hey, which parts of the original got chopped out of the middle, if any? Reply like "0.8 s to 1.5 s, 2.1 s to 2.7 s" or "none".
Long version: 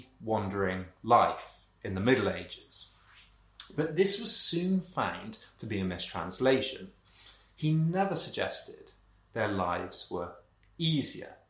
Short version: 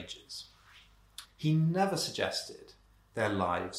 3.7 s to 7.4 s

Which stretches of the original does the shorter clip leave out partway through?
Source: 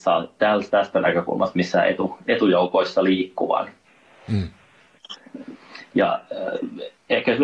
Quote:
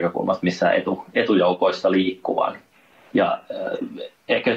4.2 s to 5.9 s

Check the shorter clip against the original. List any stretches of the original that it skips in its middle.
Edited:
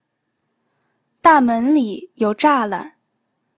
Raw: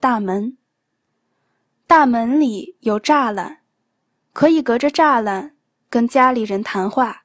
none

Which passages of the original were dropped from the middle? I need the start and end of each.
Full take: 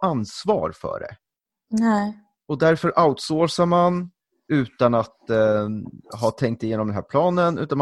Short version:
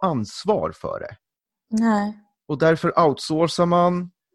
none

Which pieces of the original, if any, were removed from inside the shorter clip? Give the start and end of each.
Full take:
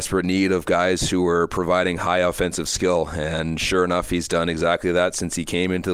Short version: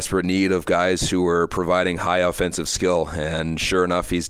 none

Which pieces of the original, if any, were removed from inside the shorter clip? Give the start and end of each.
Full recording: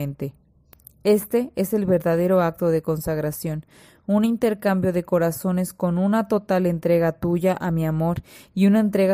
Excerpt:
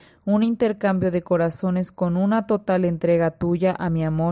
none

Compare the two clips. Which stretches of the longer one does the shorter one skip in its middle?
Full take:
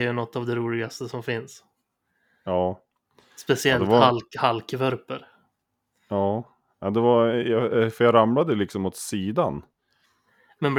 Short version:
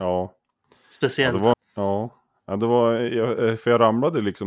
4.0 s to 5.9 s

